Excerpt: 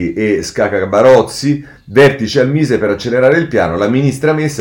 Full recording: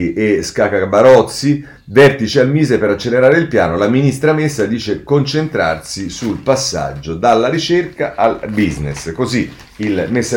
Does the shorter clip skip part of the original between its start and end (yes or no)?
no